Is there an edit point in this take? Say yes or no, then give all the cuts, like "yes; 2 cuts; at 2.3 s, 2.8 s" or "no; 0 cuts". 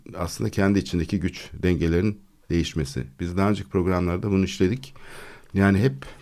no; 0 cuts